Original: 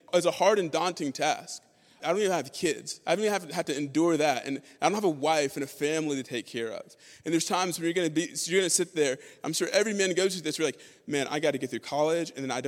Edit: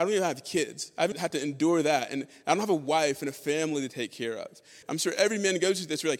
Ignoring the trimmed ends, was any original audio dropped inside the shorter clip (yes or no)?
yes